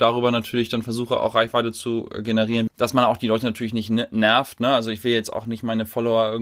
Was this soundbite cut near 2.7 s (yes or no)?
yes